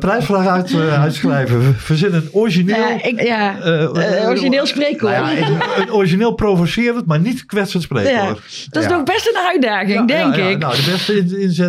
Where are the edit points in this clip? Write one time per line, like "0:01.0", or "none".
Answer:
0:03.2